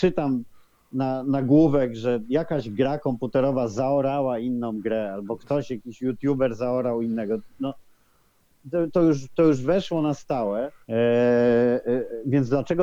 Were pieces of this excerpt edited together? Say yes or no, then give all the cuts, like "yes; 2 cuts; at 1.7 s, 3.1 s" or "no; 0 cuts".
yes; 1 cut; at 10.8 s